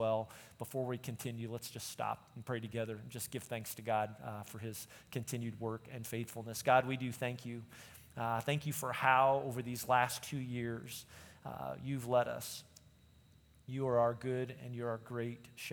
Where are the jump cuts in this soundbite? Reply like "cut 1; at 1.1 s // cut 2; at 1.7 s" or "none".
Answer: none